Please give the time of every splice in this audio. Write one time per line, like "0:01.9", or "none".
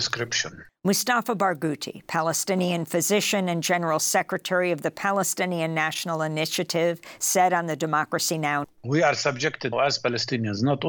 0:08.6
0:09.7